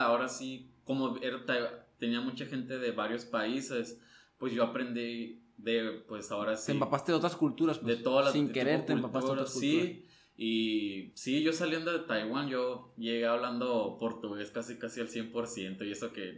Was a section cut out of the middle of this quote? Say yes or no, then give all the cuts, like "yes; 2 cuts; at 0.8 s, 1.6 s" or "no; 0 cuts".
no; 0 cuts